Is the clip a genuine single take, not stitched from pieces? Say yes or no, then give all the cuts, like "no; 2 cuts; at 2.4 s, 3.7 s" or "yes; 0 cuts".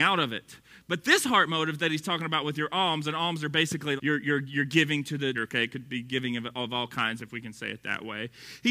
no; 3 cuts; at 4.0 s, 5.3 s, 7.2 s